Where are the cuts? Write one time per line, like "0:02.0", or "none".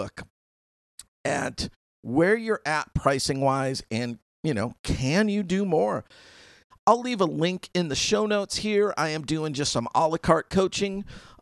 0:06.7